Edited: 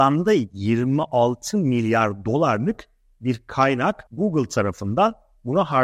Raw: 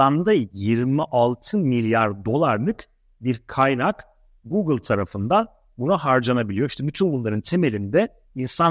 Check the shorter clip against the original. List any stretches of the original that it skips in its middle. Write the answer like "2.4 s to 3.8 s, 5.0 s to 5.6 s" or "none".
4.1 s to 4.4 s